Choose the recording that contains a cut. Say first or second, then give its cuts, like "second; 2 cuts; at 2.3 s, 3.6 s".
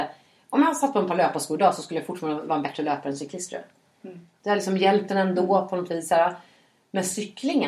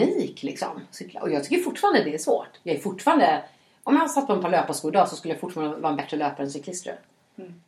first; 1 cut; at 4.4 s